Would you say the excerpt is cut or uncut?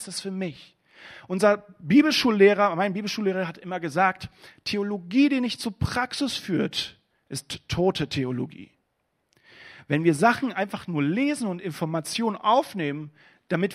uncut